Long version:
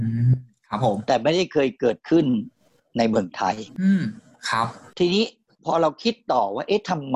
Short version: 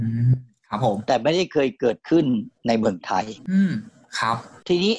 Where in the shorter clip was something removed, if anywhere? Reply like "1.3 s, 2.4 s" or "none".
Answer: 2.6 s